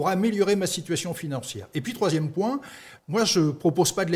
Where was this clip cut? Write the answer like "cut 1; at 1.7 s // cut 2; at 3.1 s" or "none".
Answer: cut 1; at 3.0 s